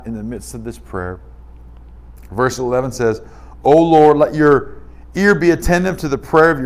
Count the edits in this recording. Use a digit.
0